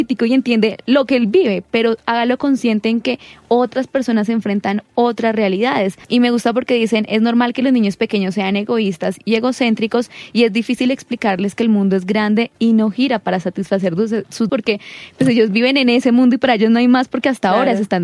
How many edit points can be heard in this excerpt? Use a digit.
2